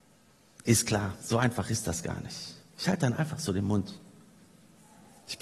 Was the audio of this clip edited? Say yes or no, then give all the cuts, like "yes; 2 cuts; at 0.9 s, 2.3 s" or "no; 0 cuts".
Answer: no; 0 cuts